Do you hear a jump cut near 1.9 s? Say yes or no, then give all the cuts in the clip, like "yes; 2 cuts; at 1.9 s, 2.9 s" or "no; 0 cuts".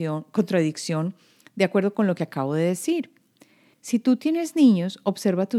no; 1 cut; at 3.7 s